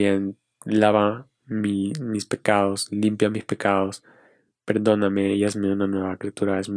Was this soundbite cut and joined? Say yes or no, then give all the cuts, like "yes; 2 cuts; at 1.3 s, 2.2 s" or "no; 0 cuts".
no; 0 cuts